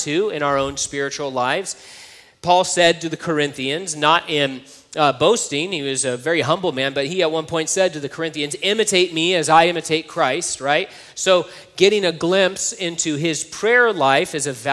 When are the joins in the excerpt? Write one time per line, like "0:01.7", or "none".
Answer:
none